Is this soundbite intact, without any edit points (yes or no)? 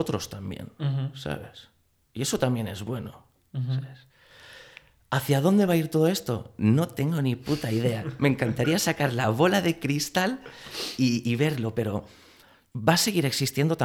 yes